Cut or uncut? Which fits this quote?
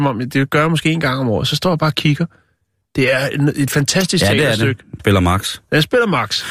cut